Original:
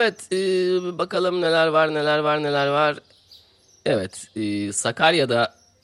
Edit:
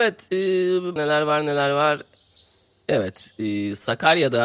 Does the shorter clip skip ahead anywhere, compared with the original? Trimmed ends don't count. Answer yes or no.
yes